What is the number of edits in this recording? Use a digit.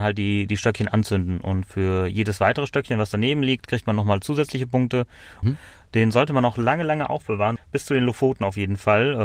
2